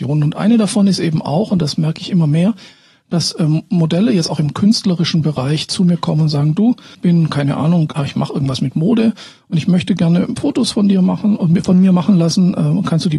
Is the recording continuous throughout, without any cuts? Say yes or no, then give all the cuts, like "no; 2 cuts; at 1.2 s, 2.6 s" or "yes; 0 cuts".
no; 1 cut; at 8.0 s